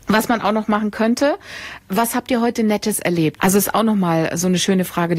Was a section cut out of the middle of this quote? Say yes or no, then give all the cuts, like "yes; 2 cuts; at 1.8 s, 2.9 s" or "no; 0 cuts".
yes; 2 cuts; at 1.8 s, 3.4 s